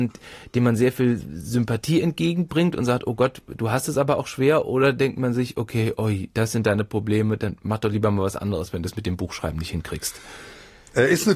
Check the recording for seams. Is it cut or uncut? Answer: uncut